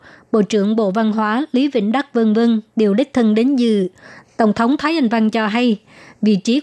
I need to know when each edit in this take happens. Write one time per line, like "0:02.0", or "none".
none